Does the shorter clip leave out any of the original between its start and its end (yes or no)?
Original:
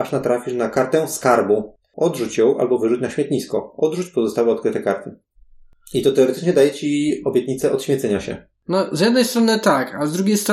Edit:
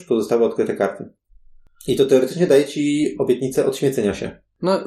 no